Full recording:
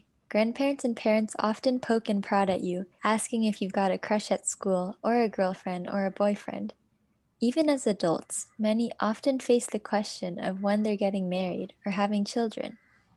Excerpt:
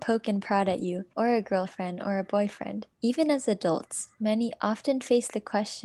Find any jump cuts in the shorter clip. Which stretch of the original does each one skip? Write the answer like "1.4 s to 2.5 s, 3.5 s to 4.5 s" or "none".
2.9 s to 5.0 s, 6.8 s to 7.3 s

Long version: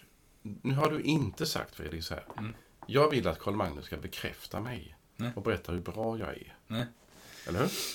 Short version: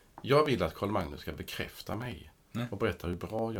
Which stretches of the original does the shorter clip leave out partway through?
none

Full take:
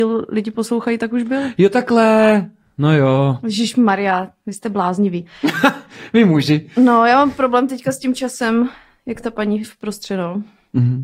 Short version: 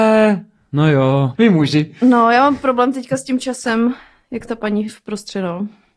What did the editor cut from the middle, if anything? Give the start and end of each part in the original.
3.4 s to 6.1 s

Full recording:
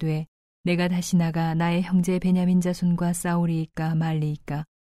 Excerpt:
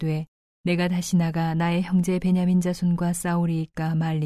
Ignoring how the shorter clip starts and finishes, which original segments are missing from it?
none

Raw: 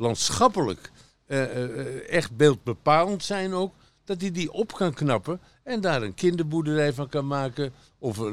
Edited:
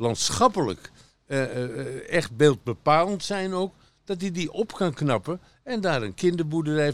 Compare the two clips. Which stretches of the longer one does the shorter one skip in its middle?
none

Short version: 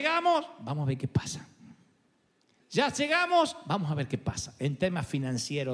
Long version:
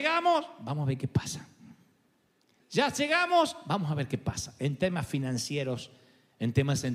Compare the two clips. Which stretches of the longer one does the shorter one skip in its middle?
none

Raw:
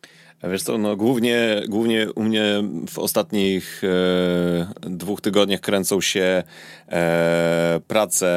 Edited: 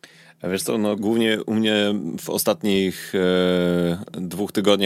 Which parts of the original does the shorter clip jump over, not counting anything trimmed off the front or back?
1.0 s to 1.7 s

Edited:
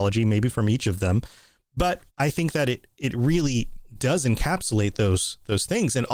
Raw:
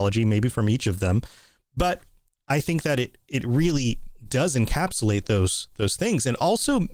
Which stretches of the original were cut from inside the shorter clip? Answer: 2.1 s to 2.4 s

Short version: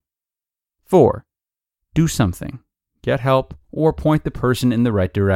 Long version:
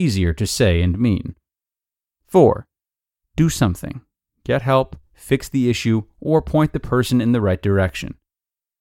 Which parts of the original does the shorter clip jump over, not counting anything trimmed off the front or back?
5.0 s to 6.1 s

